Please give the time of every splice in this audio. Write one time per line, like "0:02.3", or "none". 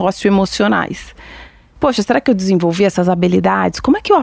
none